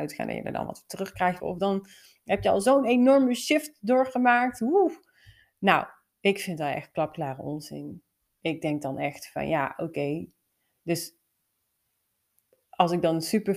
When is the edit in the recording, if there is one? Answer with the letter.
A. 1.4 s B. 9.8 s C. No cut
A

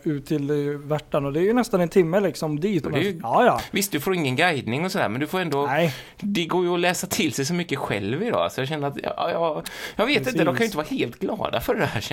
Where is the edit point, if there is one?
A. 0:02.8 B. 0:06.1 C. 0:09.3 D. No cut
A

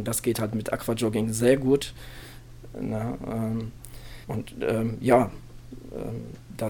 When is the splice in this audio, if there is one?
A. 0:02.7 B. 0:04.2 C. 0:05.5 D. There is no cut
B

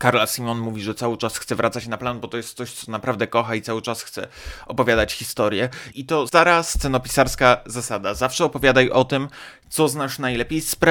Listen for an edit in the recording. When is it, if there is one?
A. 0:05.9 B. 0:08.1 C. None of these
A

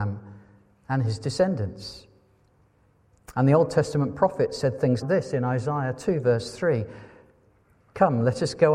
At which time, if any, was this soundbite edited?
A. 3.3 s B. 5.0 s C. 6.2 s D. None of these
B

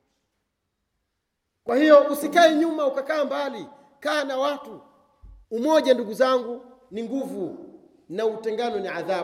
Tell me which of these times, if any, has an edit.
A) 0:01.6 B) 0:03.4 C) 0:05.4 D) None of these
C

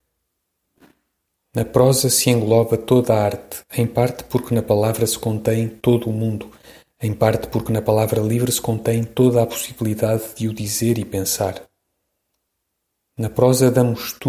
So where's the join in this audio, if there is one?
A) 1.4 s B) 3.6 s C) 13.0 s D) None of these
D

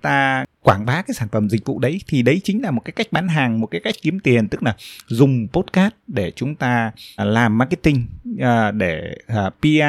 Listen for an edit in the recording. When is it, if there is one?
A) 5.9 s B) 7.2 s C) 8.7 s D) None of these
B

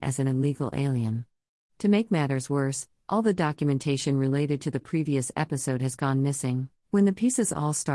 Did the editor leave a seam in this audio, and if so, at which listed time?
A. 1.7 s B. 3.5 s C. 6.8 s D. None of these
C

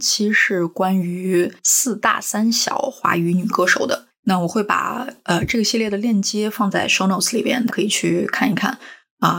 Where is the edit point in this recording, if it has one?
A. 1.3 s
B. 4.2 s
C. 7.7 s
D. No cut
C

